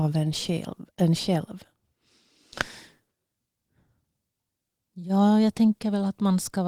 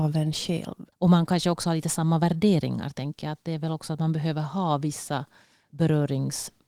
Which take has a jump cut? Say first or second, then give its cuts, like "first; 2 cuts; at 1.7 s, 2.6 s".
second; 1 cut; at 0.9 s